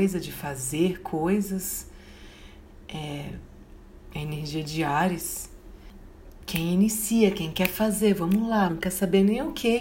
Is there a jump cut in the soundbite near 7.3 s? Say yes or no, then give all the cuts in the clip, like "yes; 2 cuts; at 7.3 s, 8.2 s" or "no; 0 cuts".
no; 1 cut; at 8.7 s